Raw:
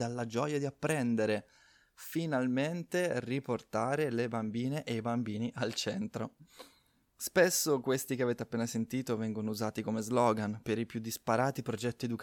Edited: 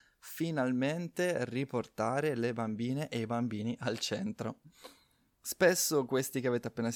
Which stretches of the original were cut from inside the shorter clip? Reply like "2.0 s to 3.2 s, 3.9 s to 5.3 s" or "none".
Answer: none